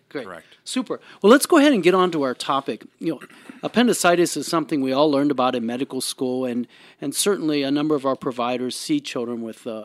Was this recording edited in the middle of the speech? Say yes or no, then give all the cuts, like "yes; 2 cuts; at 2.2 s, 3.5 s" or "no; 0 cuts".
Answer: no; 0 cuts